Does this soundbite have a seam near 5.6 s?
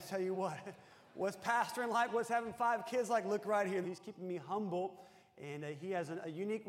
no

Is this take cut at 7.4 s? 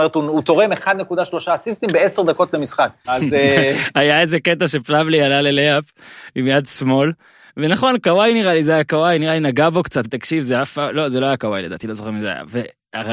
no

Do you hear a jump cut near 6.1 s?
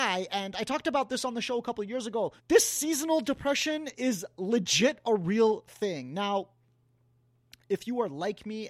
no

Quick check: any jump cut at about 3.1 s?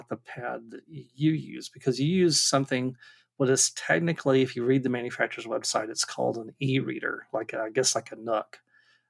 no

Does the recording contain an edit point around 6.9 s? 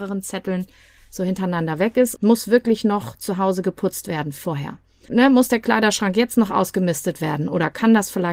no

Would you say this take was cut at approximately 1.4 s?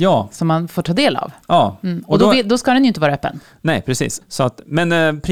no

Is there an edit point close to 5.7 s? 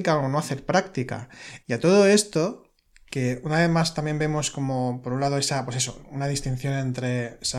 no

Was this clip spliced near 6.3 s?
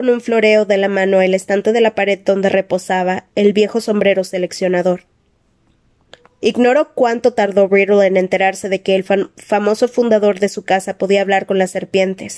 no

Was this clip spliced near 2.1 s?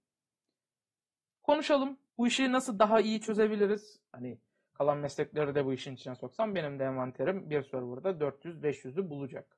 yes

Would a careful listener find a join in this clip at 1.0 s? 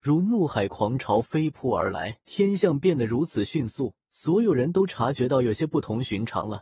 no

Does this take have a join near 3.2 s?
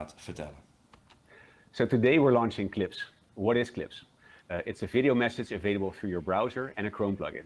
no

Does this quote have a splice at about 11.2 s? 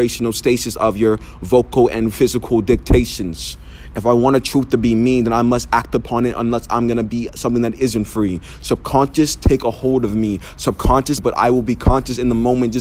yes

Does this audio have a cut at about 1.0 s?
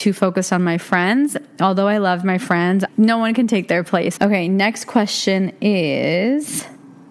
no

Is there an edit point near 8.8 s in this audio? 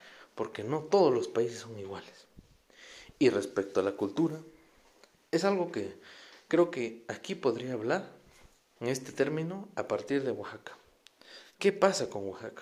yes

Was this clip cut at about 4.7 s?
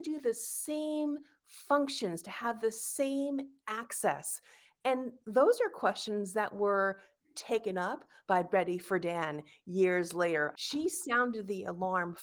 no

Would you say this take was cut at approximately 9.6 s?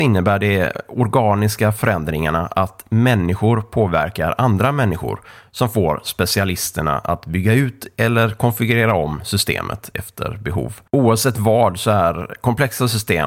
no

